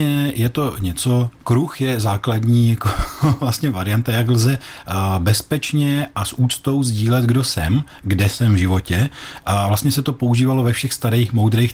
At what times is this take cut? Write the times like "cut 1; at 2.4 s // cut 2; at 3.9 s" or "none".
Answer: none